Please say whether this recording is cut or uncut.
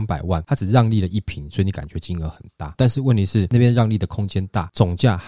uncut